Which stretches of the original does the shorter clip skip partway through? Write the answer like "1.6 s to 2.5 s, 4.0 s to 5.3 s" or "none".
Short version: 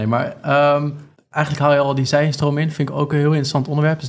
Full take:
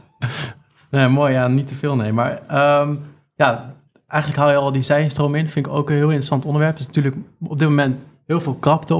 3.2 s to 3.9 s